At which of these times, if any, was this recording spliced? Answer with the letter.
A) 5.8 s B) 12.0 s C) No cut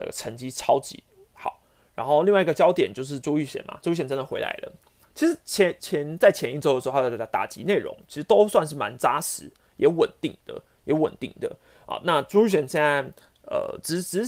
A